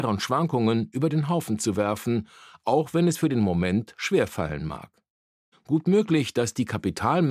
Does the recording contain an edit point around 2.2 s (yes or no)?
no